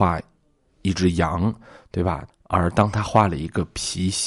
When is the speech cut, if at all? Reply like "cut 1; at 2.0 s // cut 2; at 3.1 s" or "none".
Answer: cut 1; at 2.3 s